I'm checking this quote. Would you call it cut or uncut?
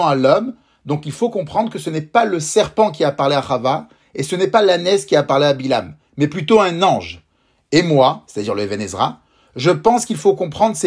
uncut